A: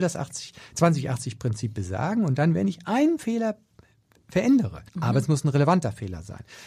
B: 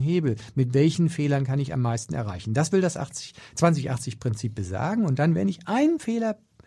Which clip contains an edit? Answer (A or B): A